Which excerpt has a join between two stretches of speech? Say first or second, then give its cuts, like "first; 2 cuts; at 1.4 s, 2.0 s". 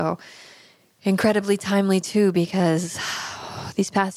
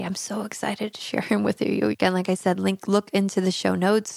second; 1 cut; at 1.9 s